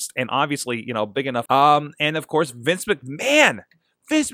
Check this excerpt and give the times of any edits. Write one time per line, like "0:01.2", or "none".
0:01.5